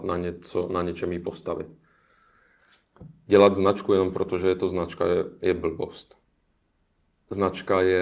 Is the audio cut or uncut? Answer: uncut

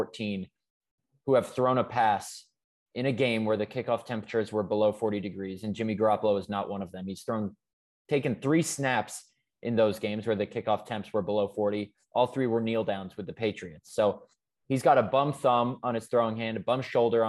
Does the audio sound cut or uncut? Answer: uncut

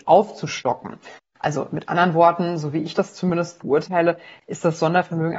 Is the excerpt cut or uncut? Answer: uncut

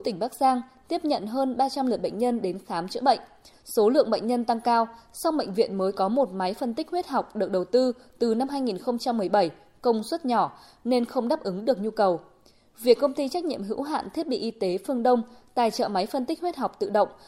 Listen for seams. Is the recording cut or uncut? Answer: uncut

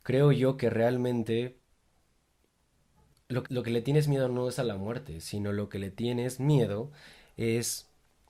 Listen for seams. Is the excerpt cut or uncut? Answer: cut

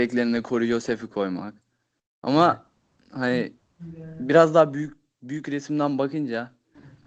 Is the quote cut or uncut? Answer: uncut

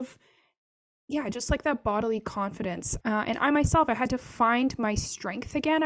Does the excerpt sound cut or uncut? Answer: cut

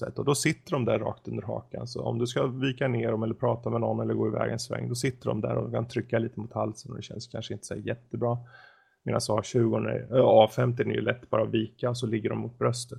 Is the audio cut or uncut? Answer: uncut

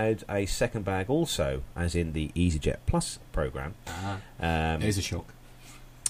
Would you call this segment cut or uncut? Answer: uncut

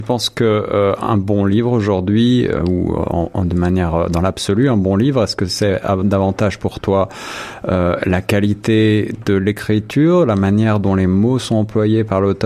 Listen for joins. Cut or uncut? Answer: uncut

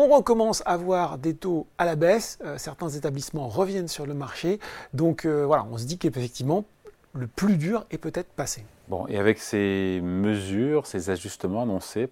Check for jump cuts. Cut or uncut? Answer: uncut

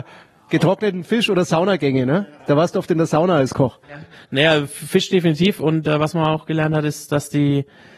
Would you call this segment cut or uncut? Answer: cut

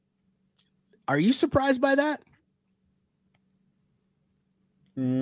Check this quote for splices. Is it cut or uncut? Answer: uncut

